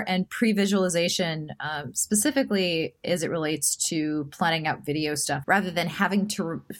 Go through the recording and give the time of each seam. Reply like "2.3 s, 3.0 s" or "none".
5.4 s